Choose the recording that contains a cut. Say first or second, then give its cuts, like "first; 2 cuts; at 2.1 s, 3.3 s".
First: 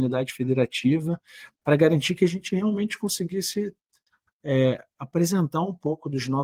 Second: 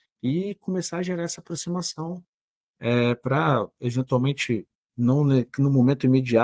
first; 1 cut; at 1.5 s